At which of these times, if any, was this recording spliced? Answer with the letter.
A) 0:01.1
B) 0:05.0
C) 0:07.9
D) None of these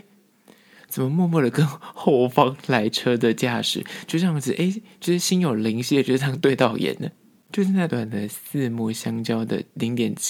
C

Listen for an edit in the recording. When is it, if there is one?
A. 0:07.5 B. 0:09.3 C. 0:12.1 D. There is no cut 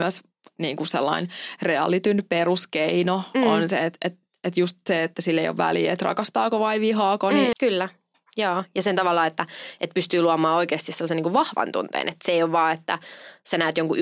A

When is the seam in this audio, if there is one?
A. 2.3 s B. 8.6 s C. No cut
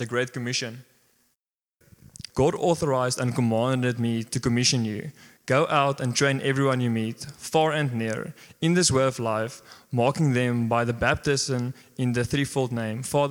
A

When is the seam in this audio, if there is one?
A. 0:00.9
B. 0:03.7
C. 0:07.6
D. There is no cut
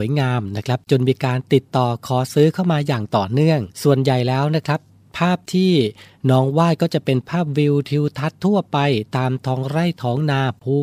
B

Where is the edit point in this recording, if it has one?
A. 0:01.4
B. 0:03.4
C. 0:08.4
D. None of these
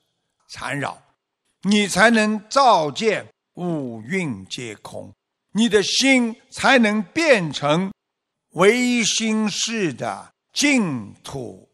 A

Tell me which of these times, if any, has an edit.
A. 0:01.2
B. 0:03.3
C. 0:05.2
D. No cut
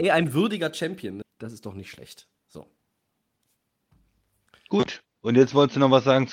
A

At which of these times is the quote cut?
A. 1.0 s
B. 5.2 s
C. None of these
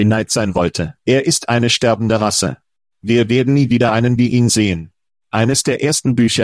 A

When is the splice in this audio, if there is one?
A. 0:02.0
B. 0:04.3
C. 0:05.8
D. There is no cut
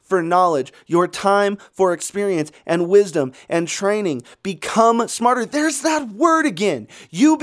D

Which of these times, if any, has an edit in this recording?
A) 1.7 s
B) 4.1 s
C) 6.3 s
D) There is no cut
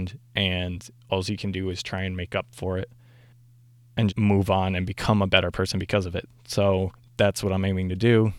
B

